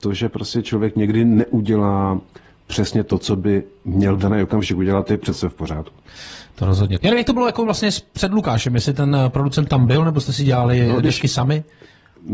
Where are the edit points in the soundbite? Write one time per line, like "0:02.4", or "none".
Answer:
0:07.0

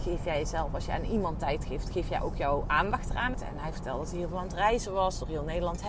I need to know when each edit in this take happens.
0:03.3

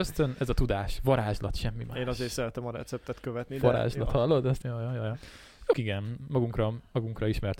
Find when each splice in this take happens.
0:04.6
0:05.7

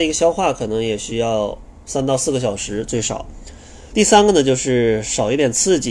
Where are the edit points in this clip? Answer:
0:03.9

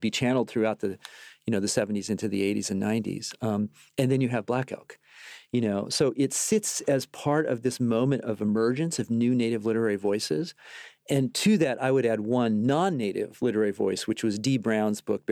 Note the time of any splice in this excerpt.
none

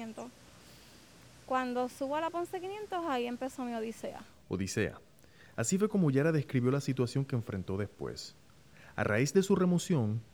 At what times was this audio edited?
none

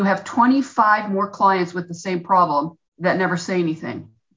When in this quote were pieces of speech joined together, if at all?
0:02.9

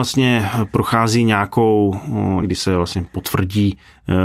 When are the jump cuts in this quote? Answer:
0:02.4

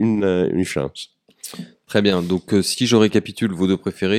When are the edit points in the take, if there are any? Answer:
none

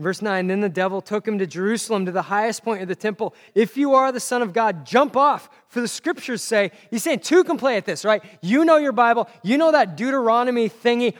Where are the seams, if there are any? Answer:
0:03.5

